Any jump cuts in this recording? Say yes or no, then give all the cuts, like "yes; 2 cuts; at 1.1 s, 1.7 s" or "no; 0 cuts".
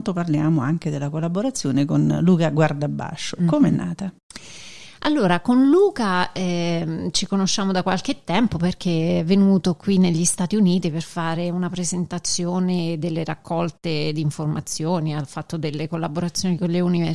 no; 0 cuts